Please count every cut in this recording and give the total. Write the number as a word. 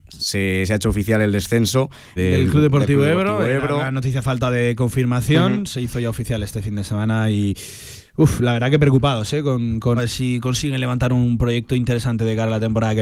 two